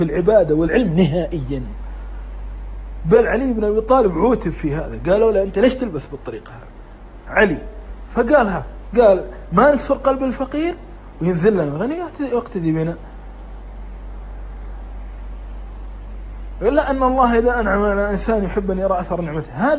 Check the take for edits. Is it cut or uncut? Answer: uncut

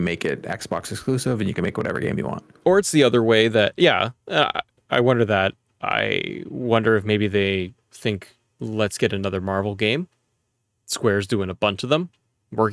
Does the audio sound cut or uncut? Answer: uncut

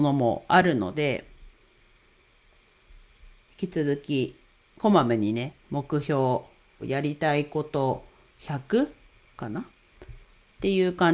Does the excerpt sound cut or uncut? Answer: cut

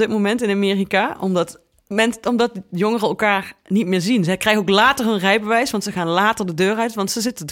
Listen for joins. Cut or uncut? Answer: uncut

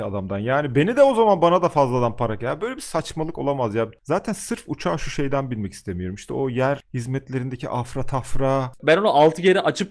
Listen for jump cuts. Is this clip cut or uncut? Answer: cut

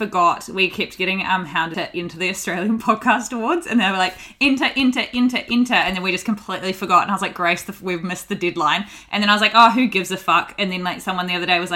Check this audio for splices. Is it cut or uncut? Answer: uncut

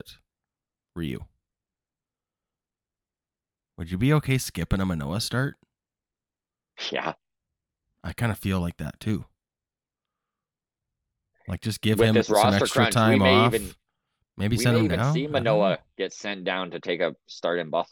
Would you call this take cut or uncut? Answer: uncut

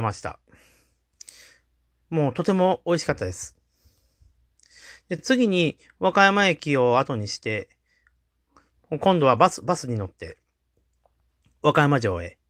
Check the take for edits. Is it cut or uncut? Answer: uncut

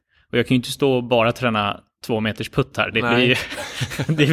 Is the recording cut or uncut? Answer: uncut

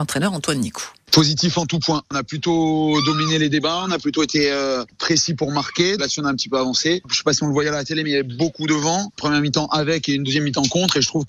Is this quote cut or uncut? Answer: cut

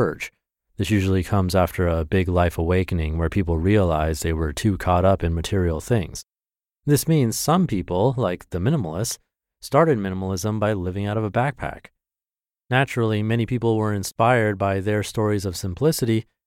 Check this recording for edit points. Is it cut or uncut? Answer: uncut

